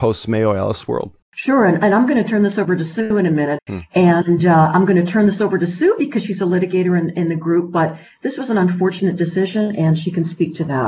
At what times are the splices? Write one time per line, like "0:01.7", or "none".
0:01.2
0:03.6